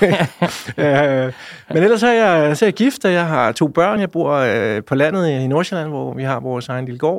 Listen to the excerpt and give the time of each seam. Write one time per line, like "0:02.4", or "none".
none